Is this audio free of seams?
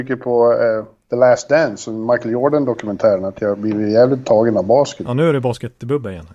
yes; 0 cuts

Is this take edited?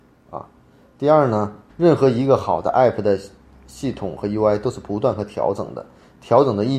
yes; 1 cut; at 1.7 s

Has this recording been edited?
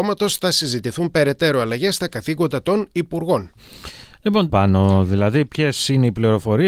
yes; 1 cut; at 4.5 s

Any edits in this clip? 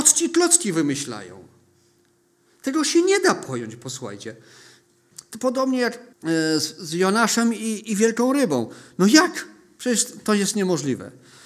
yes; 1 cut; at 6.1 s

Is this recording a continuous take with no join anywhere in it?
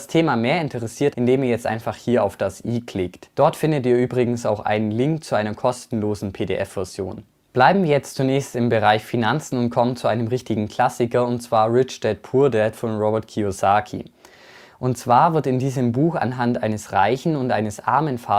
no; 2 cuts; at 1.1 s, 3.3 s

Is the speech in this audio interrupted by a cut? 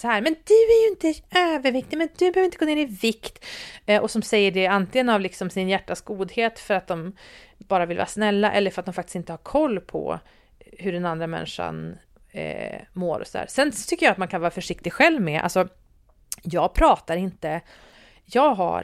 no; 0 cuts

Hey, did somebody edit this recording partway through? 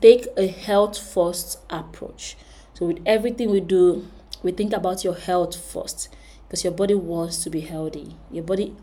no; 0 cuts

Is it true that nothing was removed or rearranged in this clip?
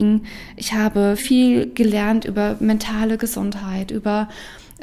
no; 1 cut; at 1.2 s

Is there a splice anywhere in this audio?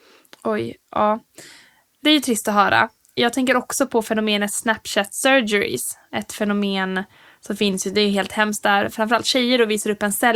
no; 0 cuts

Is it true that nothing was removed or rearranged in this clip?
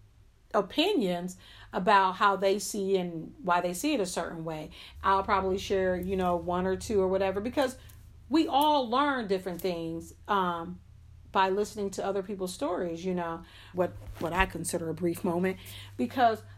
no; 2 cuts; at 5.0 s, 13.7 s

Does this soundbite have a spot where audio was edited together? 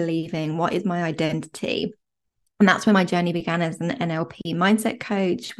no; 0 cuts

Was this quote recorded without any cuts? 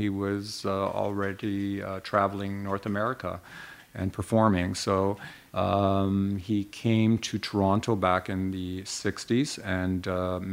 yes; 0 cuts

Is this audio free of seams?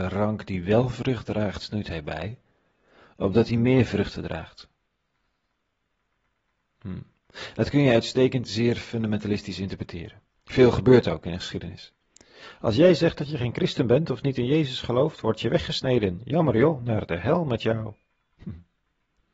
yes; 0 cuts

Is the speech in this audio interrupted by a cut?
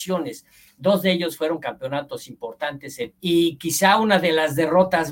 yes; 1 cut; at 3.1 s

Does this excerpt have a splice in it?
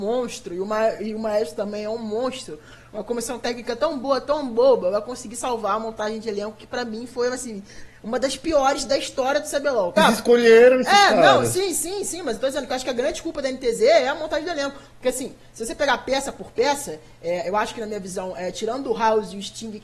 yes; 1 cut; at 10.0 s

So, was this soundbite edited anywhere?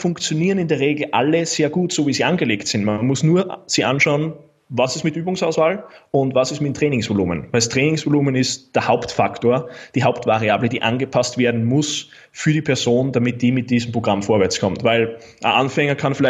no; 0 cuts

